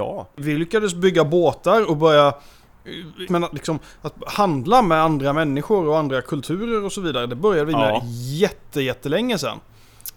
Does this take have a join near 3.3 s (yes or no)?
yes